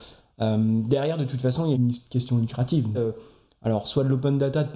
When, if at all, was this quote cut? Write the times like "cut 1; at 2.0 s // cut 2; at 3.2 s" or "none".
cut 1; at 1.7 s // cut 2; at 2.9 s